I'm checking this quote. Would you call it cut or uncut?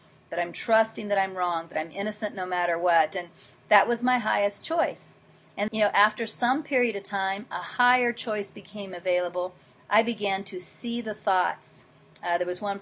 cut